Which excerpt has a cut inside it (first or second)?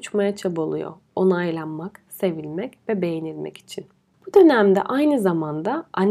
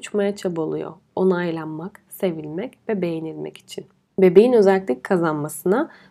second